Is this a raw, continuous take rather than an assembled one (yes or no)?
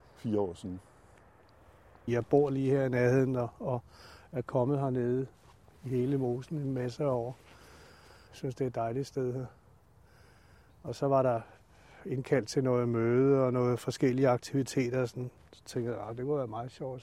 yes